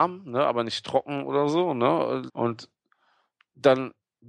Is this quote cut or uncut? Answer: cut